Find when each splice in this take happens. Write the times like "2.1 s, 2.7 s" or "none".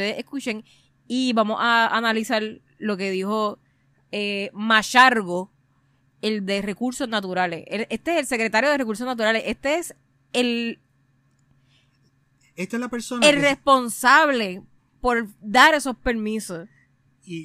14.8 s